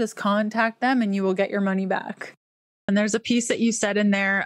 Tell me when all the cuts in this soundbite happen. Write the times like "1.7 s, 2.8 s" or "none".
2.9 s